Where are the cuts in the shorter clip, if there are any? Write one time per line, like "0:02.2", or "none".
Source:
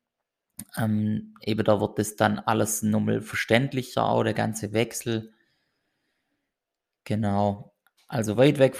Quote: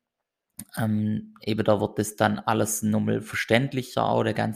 none